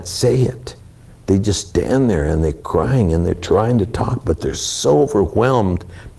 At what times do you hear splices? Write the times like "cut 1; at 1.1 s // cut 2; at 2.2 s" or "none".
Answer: none

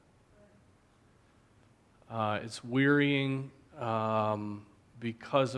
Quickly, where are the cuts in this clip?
none

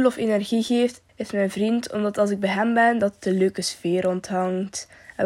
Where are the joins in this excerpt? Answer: cut 1; at 1.1 s

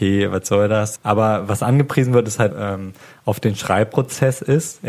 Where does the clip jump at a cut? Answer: cut 1; at 1.0 s // cut 2; at 2.5 s

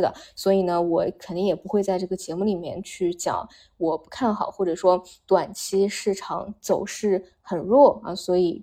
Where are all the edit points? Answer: none

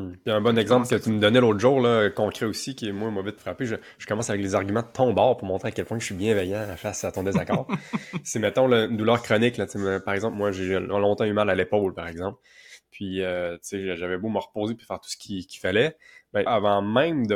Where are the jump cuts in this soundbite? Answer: cut 1; at 3.4 s // cut 2; at 16.5 s

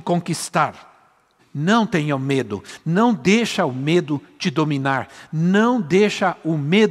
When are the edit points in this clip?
cut 1; at 1.4 s

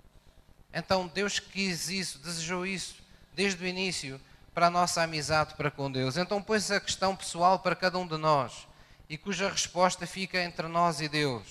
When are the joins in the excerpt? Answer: none

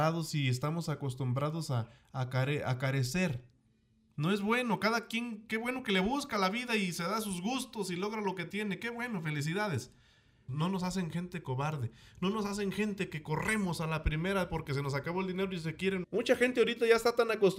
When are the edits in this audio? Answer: cut 1; at 10.5 s // cut 2; at 16.0 s

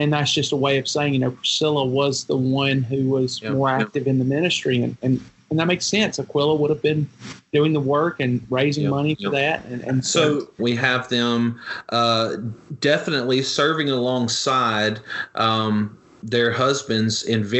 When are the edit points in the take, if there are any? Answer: cut 1; at 10.6 s

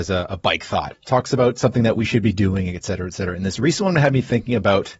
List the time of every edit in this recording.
cut 1; at 0.9 s

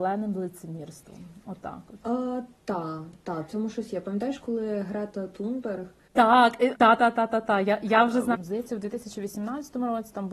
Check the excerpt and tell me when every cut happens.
cut 1; at 6.7 s // cut 2; at 8.3 s

